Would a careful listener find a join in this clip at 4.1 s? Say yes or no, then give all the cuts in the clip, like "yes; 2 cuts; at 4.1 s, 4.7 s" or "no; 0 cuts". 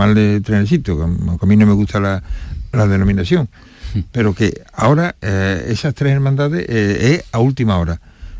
no; 0 cuts